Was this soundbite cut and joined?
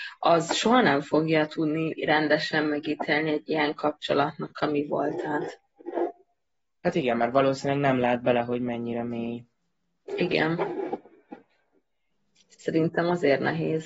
no; 0 cuts

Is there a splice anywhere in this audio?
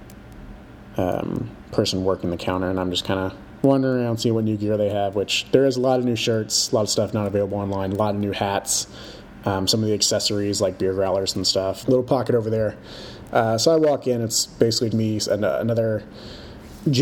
yes; 2 cuts; at 11.8 s, 14.9 s

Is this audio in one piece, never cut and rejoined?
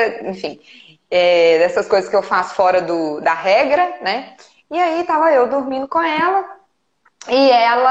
yes; 0 cuts

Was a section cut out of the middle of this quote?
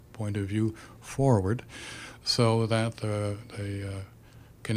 no; 0 cuts

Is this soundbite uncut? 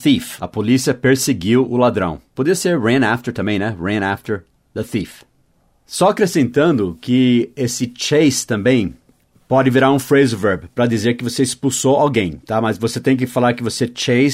yes; 0 cuts

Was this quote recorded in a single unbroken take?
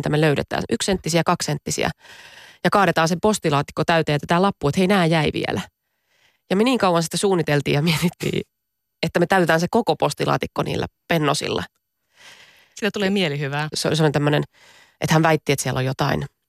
no; 1 cut; at 13.7 s

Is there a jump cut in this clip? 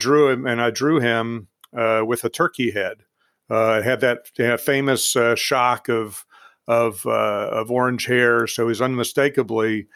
no; 0 cuts

